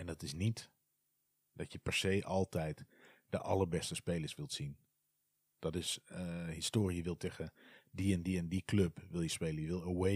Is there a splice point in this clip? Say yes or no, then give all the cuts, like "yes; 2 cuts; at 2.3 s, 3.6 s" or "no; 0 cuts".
no; 0 cuts